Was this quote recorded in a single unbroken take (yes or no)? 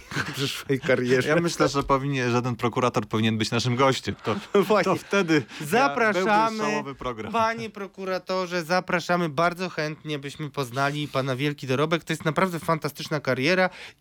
yes